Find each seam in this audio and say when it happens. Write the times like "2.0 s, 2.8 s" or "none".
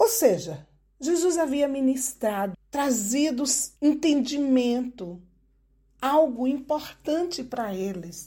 2.5 s, 3.8 s